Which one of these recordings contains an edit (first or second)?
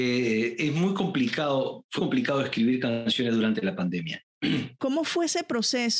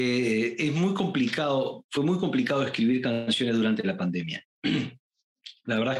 first